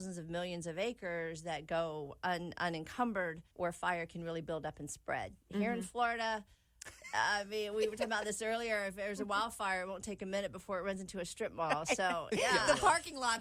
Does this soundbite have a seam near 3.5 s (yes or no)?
yes